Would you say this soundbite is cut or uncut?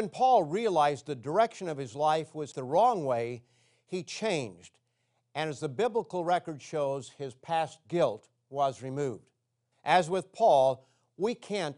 cut